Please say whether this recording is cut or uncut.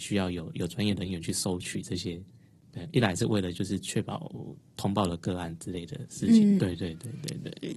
cut